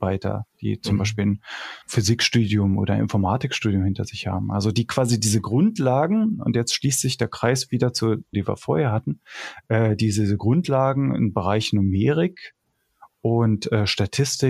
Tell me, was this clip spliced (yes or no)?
yes